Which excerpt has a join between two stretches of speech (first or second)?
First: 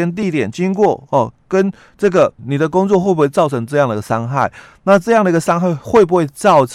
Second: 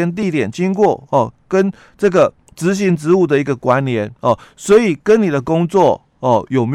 first